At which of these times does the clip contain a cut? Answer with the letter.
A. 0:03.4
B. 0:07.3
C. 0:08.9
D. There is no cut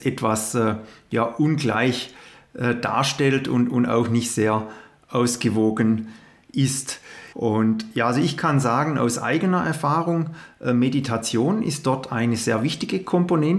B